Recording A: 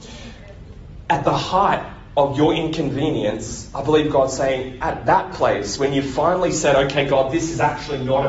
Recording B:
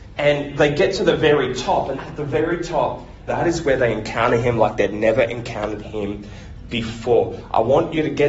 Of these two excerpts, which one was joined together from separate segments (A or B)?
B